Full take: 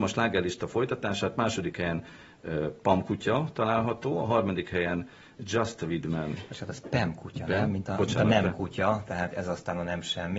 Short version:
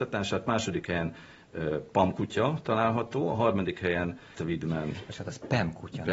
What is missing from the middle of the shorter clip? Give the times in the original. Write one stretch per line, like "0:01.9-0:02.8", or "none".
0:05.3-0:05.8

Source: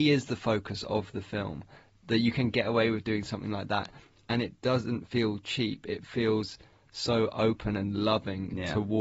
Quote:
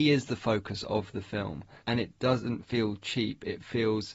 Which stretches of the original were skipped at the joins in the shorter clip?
0:01.8-0:04.2

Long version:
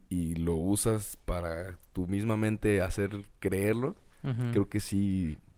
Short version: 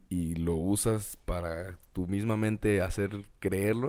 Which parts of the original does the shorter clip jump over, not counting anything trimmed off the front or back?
none

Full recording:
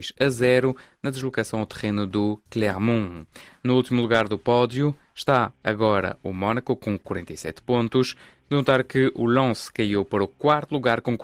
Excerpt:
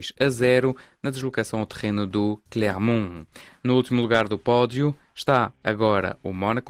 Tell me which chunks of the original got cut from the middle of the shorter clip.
none

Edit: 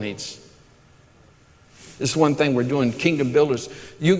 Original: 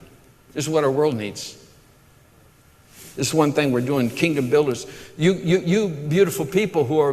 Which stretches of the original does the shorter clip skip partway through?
none

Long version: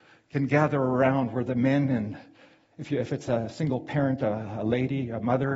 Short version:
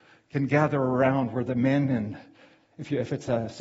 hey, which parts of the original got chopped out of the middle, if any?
none

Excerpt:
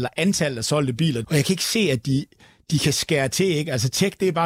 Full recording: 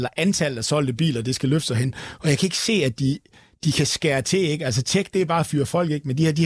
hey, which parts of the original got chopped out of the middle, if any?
0:01.2-0:02.2

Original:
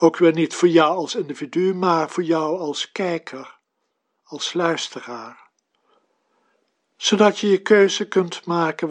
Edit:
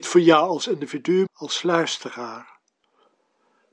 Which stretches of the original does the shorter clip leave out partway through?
0:01.7-0:04.2

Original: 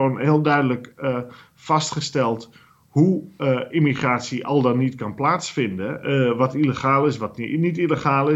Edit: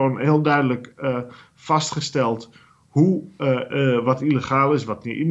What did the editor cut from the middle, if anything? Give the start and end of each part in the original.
0:03.7-0:06.0

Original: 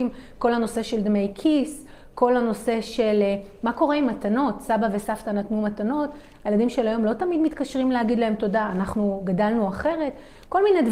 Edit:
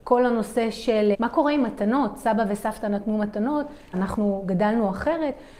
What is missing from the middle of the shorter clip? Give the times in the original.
0:03.2-0:03.6
0:06.4-0:08.7

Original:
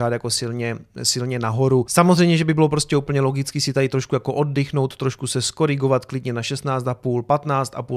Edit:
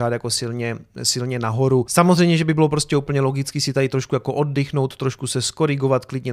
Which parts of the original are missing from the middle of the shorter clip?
none

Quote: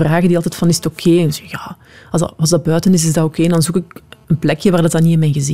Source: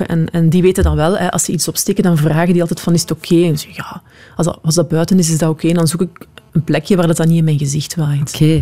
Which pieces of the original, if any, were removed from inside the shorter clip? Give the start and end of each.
none

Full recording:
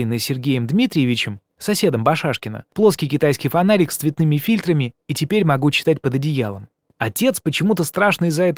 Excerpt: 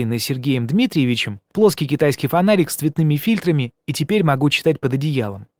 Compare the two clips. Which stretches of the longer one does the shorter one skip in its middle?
0:01.5-0:02.7

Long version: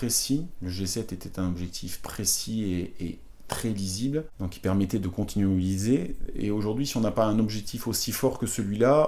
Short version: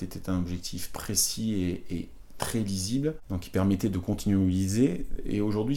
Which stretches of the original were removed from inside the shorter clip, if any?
none

